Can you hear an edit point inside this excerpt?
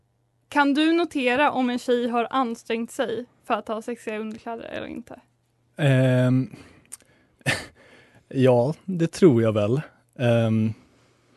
no; 0 cuts

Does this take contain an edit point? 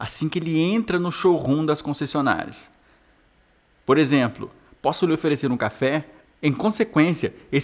yes; 1 cut; at 6.3 s

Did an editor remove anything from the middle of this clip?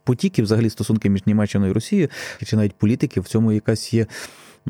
yes; 1 cut; at 2.4 s

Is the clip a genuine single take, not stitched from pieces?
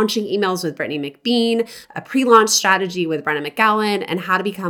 yes; 0 cuts

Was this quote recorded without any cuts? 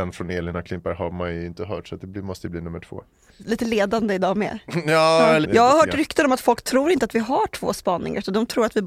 no; 1 cut; at 5.4 s

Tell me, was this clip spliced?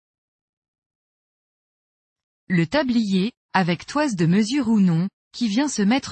no; 0 cuts

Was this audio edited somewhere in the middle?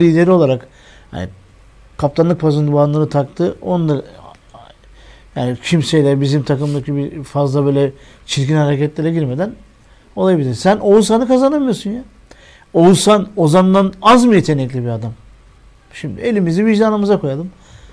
no; 0 cuts

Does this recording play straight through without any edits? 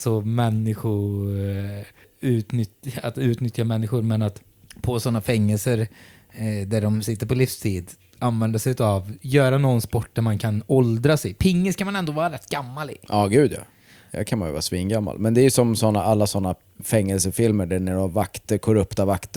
yes; 0 cuts

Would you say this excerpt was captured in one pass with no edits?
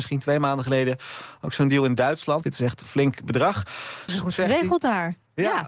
no; 2 cuts; at 2.4 s, 4.1 s

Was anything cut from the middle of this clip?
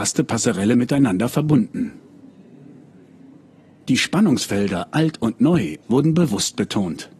yes; 1 cut; at 5.8 s

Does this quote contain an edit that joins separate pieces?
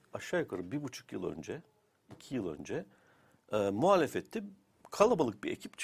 no; 0 cuts

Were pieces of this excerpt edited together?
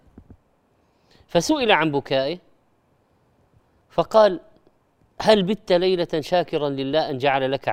no; 0 cuts

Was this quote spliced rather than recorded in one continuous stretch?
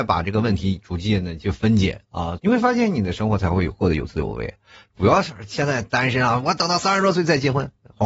yes; 1 cut; at 2.4 s

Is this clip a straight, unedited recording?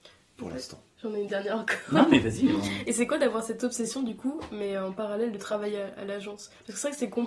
yes; 0 cuts

